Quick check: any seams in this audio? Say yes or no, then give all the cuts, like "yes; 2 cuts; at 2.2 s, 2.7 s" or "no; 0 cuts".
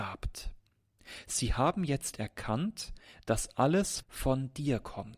yes; 1 cut; at 4.0 s